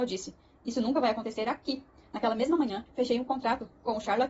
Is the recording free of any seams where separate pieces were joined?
no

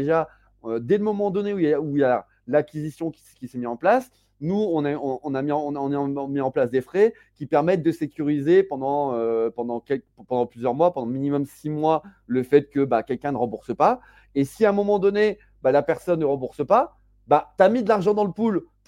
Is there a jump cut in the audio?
no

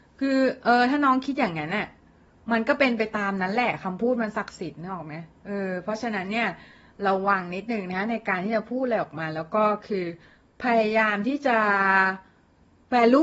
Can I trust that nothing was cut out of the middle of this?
yes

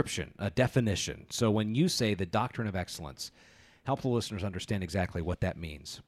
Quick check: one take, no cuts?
yes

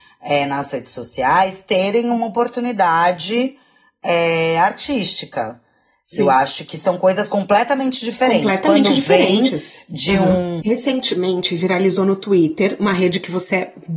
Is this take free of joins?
no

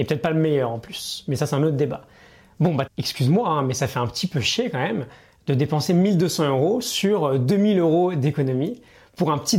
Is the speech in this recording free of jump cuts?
no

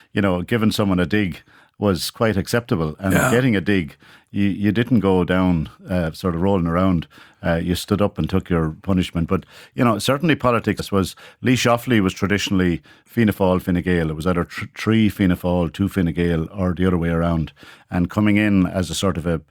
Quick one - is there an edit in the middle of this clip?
yes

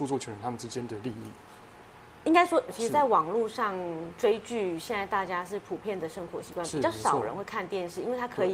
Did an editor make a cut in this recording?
yes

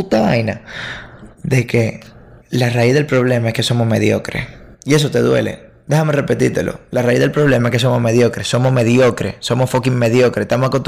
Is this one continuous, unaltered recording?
yes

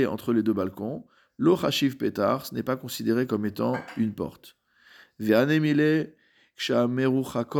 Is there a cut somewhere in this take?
no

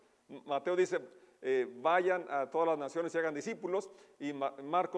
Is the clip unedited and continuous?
yes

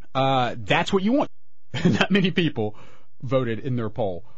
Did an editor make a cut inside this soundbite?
yes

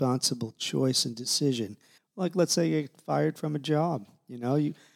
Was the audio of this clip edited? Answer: yes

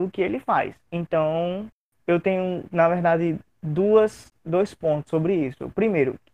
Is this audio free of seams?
yes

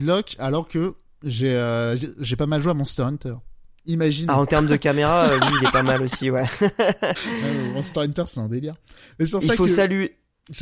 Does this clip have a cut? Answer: no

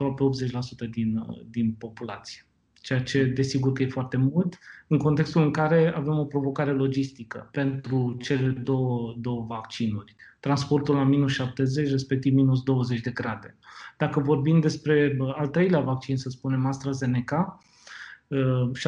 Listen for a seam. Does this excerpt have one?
no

